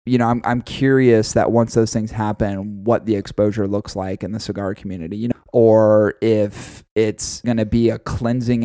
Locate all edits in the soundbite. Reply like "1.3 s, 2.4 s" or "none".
5.3 s, 7.4 s